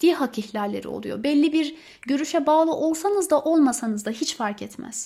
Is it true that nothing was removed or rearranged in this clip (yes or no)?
yes